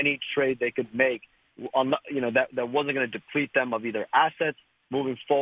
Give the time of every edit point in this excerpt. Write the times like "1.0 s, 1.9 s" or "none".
none